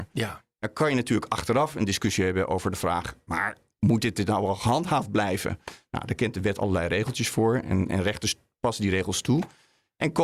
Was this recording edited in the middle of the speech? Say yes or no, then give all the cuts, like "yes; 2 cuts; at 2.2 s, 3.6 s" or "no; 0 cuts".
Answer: yes; 1 cut; at 7.9 s